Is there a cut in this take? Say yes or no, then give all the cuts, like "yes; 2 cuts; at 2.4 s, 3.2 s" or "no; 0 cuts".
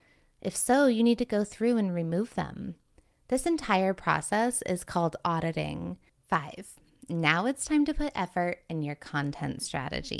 yes; 1 cut; at 6.1 s